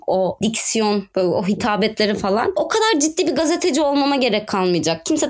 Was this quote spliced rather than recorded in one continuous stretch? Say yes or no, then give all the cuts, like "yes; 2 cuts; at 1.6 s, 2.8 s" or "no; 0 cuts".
no; 0 cuts